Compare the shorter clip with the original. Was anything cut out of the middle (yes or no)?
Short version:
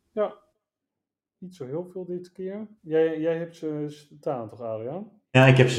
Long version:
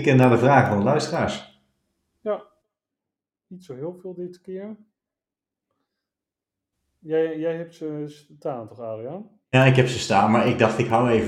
yes